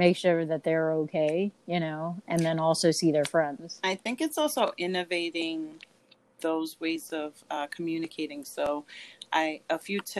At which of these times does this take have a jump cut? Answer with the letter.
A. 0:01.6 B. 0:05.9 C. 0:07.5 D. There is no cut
D